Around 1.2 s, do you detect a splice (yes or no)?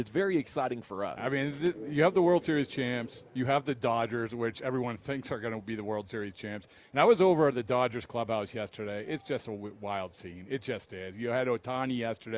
yes